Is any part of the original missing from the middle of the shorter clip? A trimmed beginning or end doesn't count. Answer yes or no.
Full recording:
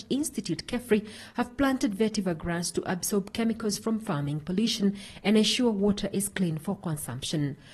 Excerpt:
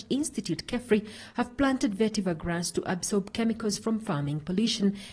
no